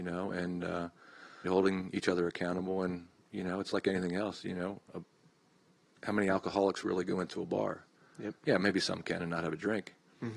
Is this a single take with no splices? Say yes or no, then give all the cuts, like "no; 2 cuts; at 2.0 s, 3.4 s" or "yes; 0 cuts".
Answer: no; 1 cut; at 1.5 s